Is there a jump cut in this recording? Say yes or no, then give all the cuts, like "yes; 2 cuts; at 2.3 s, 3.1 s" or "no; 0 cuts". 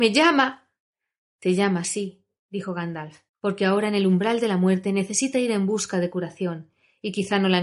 yes; 1 cut; at 3.3 s